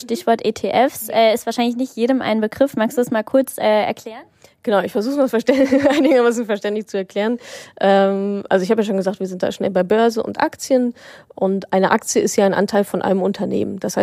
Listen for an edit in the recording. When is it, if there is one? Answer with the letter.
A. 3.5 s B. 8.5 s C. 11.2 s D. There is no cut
D